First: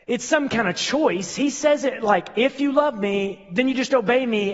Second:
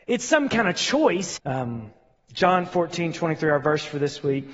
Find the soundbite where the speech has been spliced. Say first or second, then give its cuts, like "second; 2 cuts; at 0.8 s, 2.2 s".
second; 1 cut; at 1.4 s